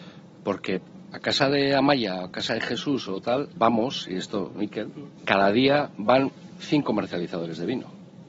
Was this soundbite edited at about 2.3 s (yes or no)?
no